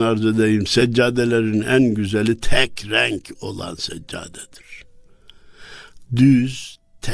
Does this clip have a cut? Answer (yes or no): yes